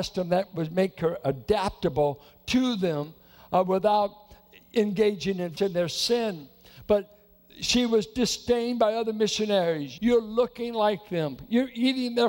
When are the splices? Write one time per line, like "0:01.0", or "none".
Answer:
0:05.6
0:10.0